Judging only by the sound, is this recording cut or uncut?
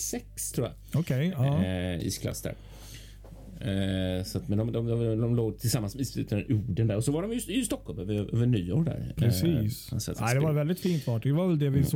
uncut